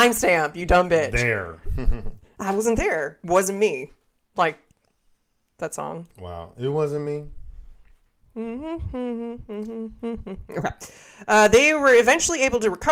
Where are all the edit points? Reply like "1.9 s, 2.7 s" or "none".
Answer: none